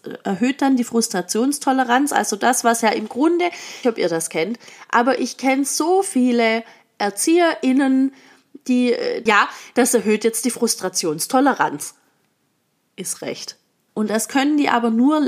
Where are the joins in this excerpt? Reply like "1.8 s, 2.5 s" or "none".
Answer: 3.8 s, 9.3 s, 13.9 s